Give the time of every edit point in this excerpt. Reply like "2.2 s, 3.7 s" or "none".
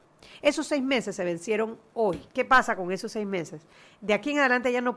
2.3 s

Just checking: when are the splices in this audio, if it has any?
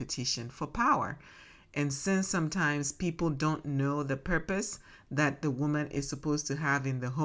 none

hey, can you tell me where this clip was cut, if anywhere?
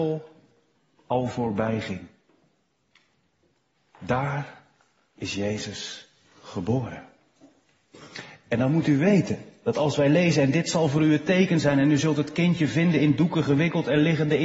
1.0 s

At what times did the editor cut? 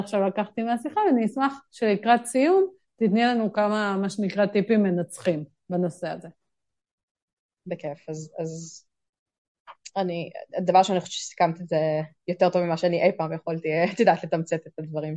none

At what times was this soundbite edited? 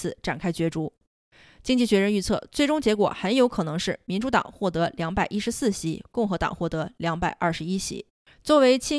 none

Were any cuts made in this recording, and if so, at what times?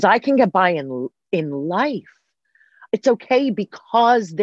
2.9 s

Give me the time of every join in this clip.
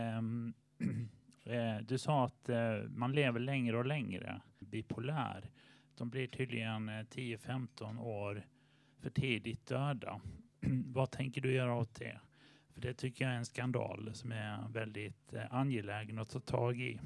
4.6 s

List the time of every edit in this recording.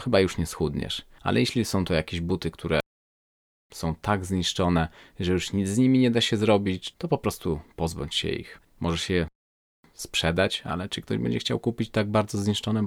1.2 s, 6.9 s

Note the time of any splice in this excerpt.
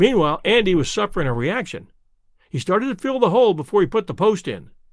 none

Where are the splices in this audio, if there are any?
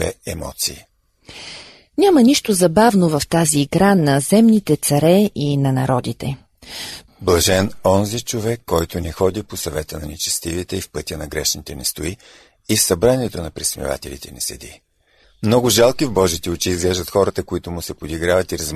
7.1 s, 15.2 s

